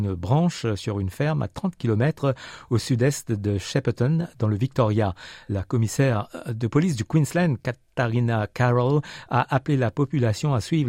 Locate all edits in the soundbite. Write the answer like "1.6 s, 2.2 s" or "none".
none